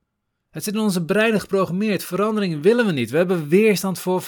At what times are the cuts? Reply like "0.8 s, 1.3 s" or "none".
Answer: none